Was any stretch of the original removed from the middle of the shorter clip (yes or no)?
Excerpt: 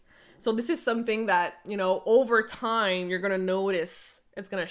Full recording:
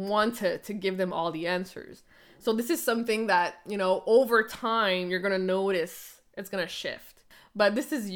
no